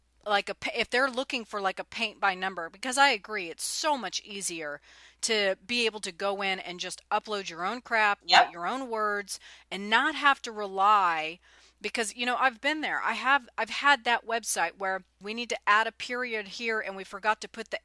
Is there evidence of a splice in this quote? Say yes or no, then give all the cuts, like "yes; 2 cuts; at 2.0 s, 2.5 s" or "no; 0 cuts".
yes; 2 cuts; at 8.2 s, 15.2 s